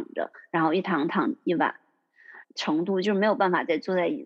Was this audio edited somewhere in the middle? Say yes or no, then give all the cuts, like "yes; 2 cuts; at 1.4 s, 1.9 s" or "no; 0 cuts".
yes; 1 cut; at 2.4 s